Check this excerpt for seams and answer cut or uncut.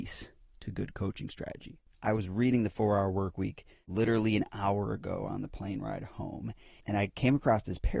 cut